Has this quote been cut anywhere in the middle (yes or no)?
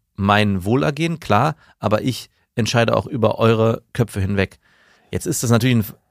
no